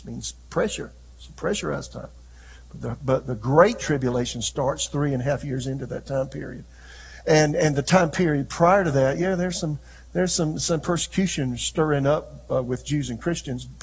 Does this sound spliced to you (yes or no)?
no